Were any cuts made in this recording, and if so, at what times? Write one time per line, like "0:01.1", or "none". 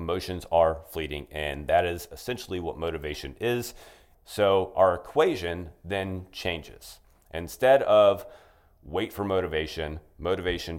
0:04.1